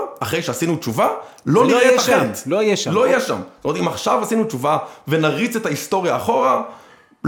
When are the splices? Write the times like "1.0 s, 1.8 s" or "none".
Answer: none